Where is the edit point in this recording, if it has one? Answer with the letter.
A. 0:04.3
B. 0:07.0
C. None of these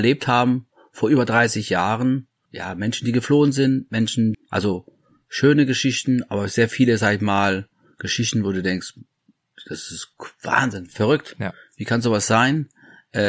A